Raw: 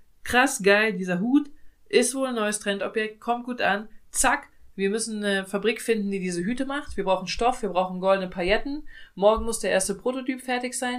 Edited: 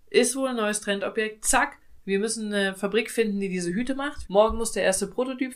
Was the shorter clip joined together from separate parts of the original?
yes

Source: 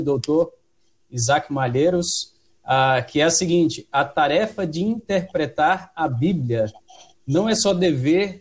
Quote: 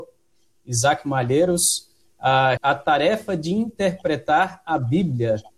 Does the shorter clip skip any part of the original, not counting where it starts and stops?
yes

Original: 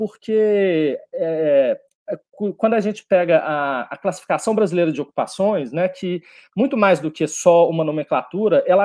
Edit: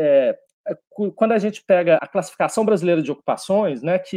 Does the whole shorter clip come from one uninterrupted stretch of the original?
no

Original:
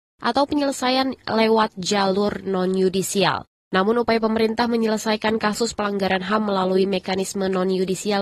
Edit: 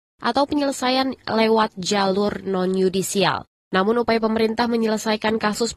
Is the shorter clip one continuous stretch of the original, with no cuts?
yes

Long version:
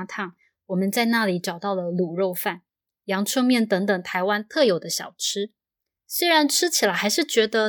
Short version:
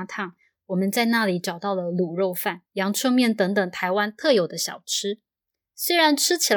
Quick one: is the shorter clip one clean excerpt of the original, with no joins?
no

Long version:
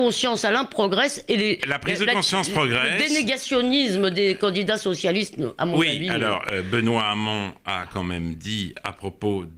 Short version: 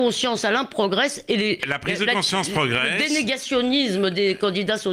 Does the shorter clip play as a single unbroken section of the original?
yes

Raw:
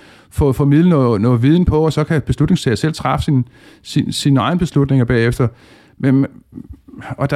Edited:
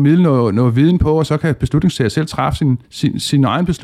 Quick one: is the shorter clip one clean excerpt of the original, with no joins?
no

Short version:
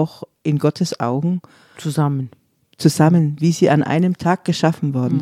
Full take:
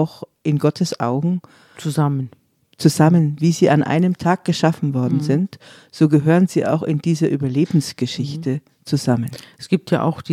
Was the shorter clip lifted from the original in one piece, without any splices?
yes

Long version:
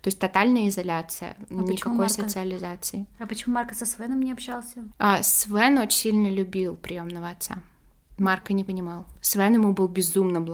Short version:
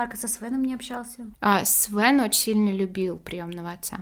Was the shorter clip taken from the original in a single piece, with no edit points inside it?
yes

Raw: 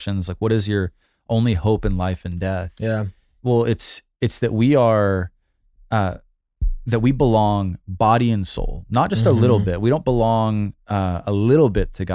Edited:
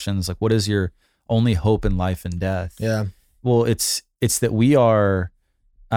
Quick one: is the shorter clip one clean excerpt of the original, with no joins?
yes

